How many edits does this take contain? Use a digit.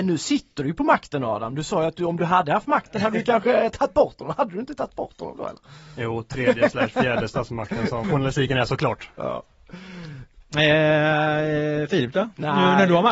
1